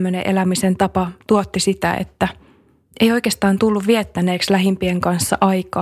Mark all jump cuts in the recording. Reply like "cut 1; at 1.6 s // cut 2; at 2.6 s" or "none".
none